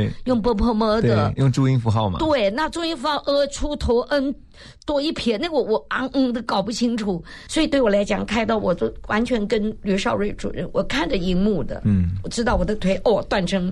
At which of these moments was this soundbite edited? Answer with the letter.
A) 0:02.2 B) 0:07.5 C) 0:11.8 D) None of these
B